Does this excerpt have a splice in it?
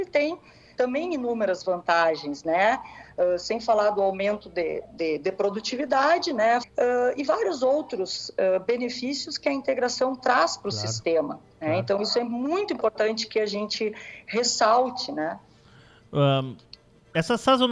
yes; 1 cut; at 6.6 s

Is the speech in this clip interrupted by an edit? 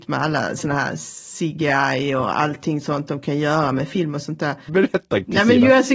yes; 1 cut; at 4.7 s

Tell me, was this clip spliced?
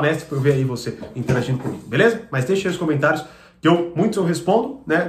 no; 0 cuts

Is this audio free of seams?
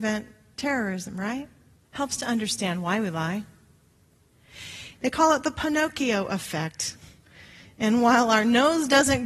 no; 2 cuts; at 1.8 s, 4.9 s

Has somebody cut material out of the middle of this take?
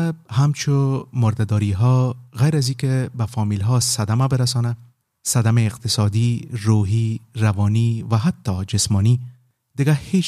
no; 0 cuts

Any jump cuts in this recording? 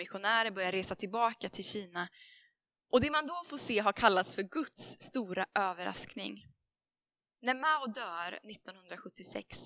yes; 1 cut; at 7.2 s

